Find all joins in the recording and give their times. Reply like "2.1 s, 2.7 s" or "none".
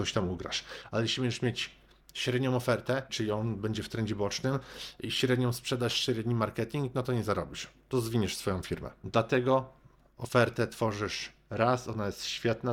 3.1 s